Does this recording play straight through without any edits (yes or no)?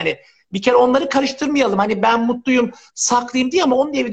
yes